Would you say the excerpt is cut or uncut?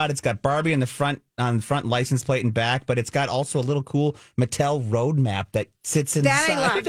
uncut